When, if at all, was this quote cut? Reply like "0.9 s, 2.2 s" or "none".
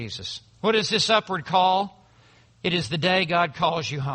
none